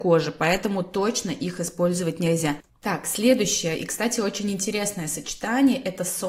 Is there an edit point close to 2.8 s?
yes; 1 cut; at 2.8 s

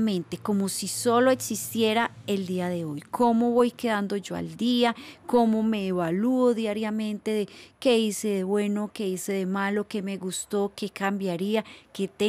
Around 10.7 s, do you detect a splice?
yes; 1 cut; at 10.7 s

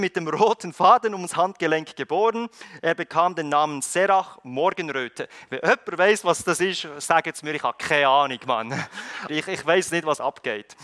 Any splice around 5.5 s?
no; 1 cut; at 9.3 s

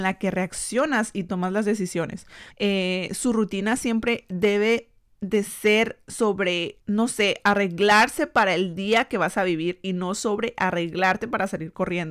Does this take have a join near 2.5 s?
yes; 2 cuts; at 2.5 s, 6.8 s

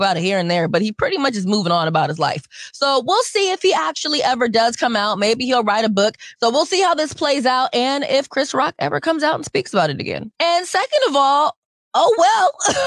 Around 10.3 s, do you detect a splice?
yes; 2 cuts; at 6.3 s, 10.3 s

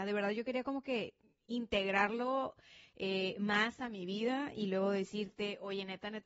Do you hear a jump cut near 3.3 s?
no; 0 cuts

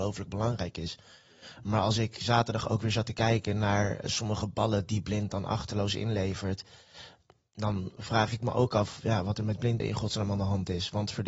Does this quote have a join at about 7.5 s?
no; 2 cuts; at 4.0 s, 9.8 s

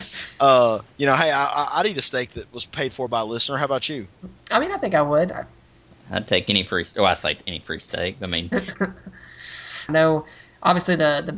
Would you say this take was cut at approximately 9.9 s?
yes; 1 cut; at 9.9 s

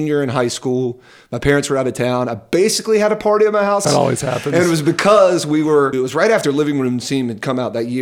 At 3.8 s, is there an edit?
yes; 2 cuts; at 3.8 s, 5.9 s

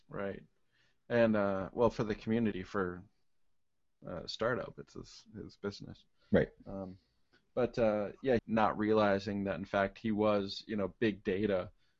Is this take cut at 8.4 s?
yes; 1 cut; at 8.4 s

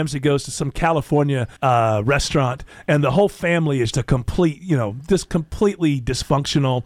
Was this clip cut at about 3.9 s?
yes; 2 cuts; at 1.6 s, 3.9 s

